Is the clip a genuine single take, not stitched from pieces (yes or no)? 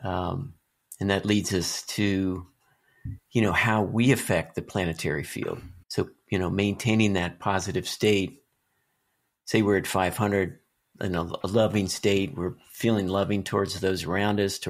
no